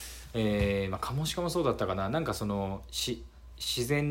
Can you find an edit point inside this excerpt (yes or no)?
no